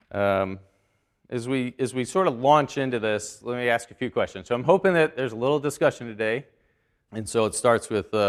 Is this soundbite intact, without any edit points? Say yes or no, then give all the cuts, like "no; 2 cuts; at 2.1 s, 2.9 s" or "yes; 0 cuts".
no; 1 cut; at 7.1 s